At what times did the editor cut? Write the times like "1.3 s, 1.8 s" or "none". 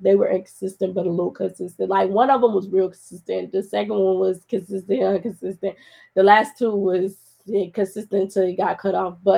none